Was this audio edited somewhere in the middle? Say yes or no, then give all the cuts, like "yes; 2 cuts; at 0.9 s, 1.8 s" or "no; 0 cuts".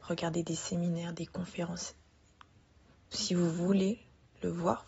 yes; 1 cut; at 3.1 s